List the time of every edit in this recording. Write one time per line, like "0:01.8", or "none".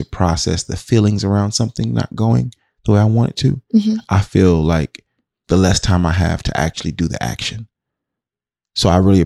none